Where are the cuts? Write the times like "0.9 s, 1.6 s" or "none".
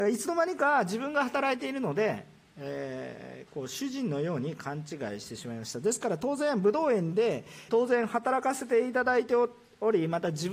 7.7 s